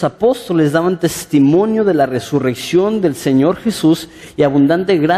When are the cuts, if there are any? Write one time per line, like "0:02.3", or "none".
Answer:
none